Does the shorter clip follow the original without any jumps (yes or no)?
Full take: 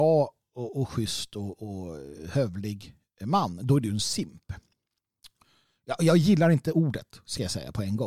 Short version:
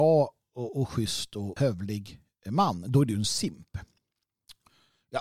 no